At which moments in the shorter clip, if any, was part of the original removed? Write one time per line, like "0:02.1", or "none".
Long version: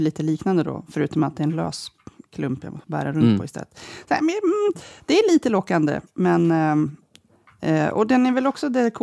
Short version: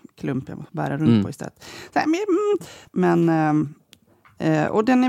0:02.9